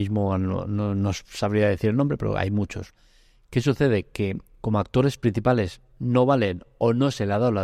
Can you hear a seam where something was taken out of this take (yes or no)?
no